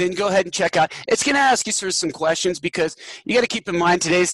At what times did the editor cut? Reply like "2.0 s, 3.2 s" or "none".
none